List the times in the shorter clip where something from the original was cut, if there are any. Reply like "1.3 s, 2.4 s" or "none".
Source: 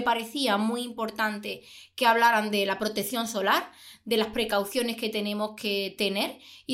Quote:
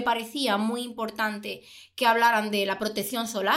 none